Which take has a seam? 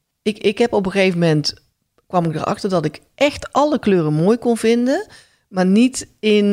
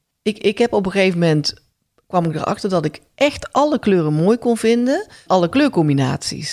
second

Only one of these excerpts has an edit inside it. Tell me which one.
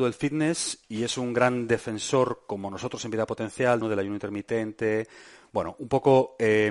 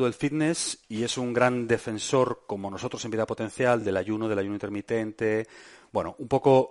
first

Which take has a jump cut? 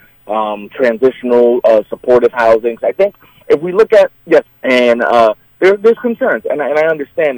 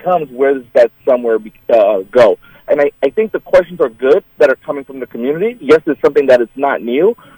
first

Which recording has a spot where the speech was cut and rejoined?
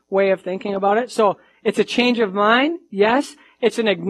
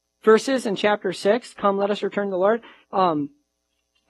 second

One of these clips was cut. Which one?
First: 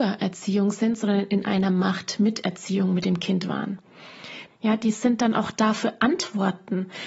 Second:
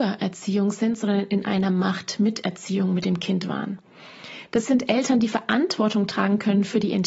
first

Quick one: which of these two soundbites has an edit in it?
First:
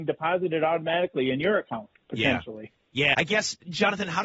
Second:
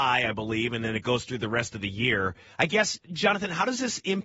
first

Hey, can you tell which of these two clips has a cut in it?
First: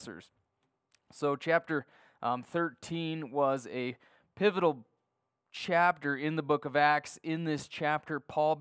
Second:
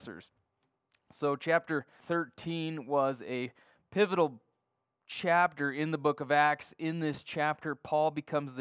second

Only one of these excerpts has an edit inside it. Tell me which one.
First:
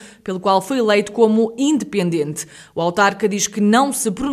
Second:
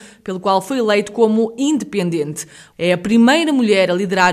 second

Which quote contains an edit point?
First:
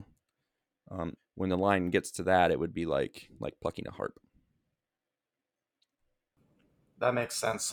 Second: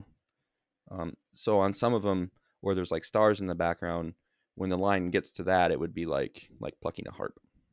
first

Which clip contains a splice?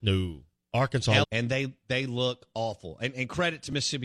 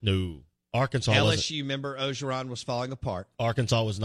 first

